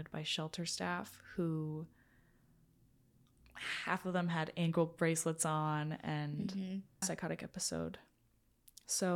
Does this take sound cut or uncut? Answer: cut